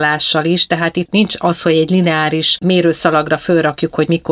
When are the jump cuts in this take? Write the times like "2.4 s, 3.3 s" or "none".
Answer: 1.1 s